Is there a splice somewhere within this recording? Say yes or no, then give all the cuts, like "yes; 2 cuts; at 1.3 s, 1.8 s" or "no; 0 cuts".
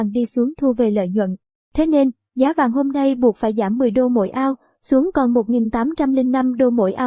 no; 0 cuts